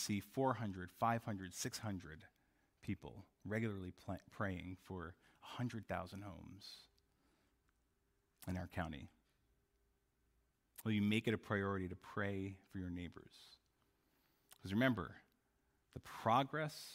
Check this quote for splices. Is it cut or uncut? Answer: cut